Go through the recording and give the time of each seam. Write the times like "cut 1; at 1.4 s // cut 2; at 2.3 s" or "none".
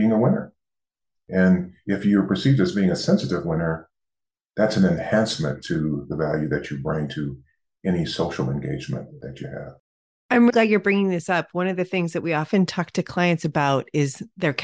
cut 1; at 10.5 s